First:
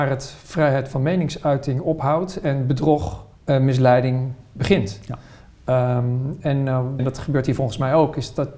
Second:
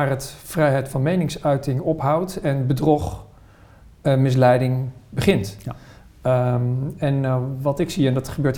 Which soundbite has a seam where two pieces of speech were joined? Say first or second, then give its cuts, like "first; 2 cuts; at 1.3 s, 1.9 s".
first; 2 cuts; at 3.3 s, 7.0 s